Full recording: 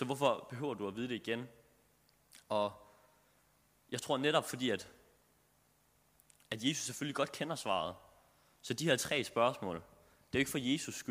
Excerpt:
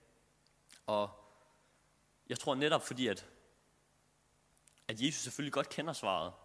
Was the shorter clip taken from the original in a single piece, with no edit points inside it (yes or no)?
yes